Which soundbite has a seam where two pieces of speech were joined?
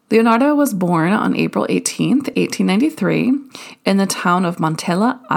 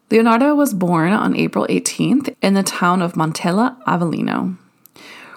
second; 1 cut; at 2.3 s

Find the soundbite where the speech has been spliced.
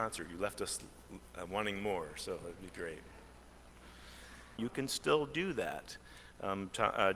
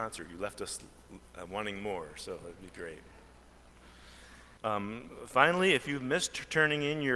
first; 1 cut; at 4.6 s

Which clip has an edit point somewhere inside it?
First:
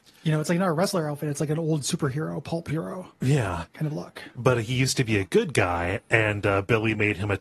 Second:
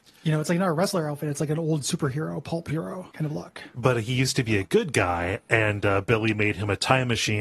second; 1 cut; at 3.1 s

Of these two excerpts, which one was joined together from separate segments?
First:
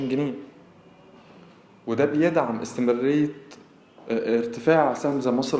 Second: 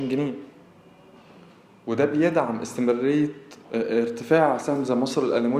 second; 1 cut; at 3.6 s

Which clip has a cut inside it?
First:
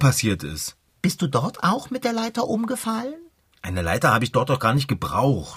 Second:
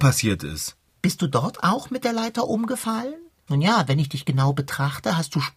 second; 1 cut; at 3.5 s

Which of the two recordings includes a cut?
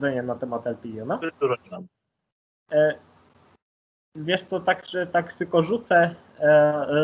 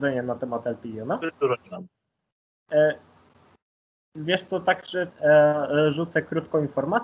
second; 1 cut; at 5.1 s

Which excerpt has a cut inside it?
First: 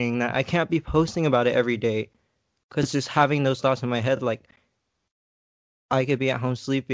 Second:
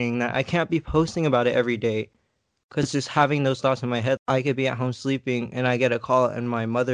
second; 1 cut; at 4.2 s

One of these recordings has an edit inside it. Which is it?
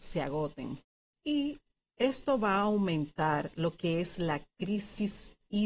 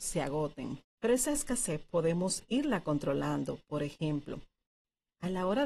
second; 1 cut; at 1.0 s

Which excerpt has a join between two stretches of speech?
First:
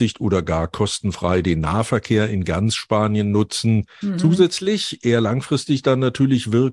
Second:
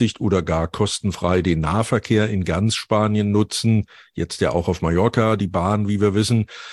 first; 1 cut; at 4.0 s

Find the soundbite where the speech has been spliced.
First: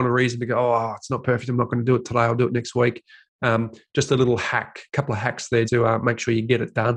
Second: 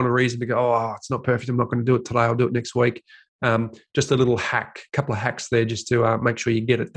first; 1 cut; at 5.6 s

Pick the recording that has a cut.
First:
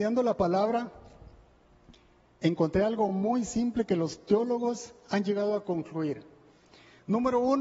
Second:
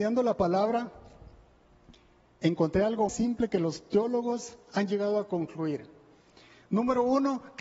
second; 1 cut; at 3.1 s

